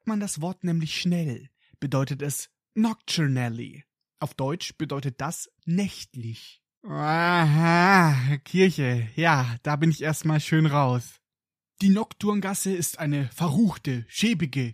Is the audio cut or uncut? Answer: cut